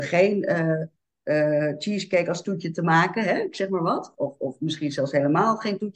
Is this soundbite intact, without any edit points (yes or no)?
yes